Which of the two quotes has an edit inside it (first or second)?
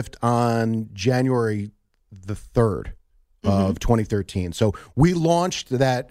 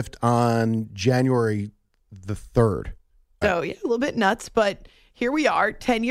second